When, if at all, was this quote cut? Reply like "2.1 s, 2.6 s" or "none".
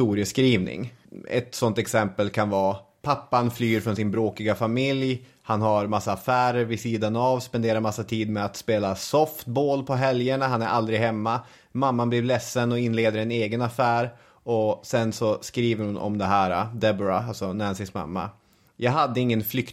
none